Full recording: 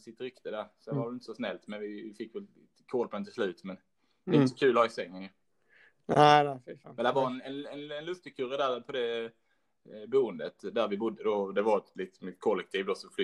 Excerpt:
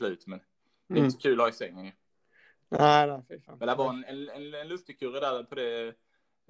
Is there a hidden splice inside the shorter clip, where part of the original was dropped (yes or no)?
no